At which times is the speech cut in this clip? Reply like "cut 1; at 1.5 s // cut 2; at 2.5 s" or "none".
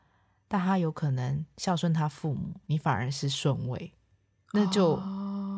cut 1; at 2.6 s